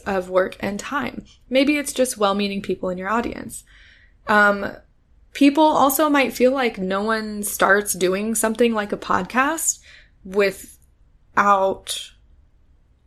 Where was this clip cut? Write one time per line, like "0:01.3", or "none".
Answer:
none

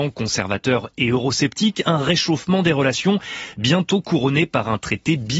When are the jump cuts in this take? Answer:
none

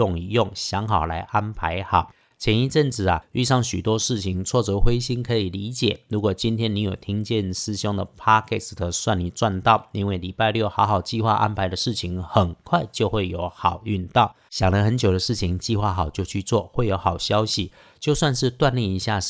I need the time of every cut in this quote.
0:14.5

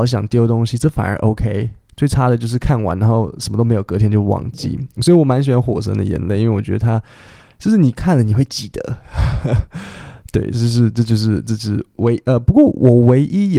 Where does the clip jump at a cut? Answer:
none

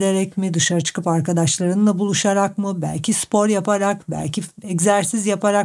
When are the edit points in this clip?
none

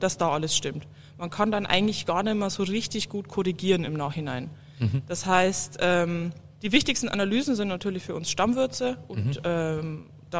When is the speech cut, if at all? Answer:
0:06.5

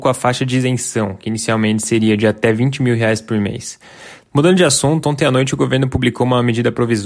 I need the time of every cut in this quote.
0:04.3

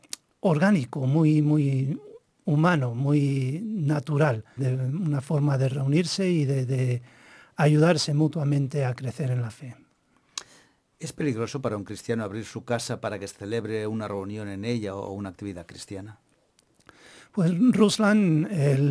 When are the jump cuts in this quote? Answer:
0:04.6

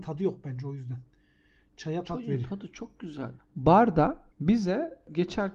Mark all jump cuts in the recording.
0:03.4

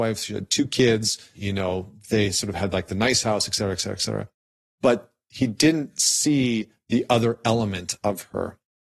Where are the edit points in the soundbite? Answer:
0:01.3
0:04.6

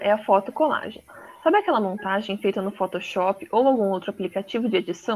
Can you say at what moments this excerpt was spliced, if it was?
none

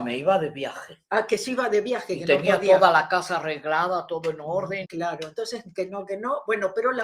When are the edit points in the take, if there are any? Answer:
0:04.8

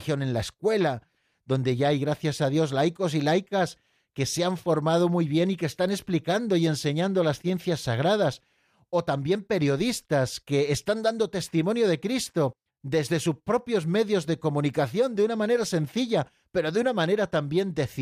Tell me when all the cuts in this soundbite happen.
0:01.3

